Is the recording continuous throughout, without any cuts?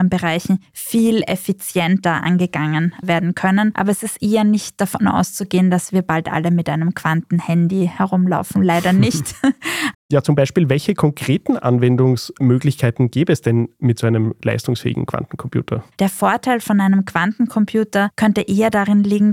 no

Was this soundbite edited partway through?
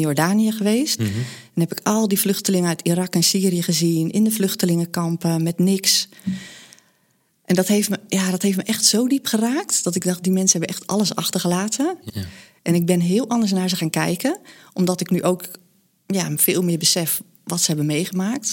yes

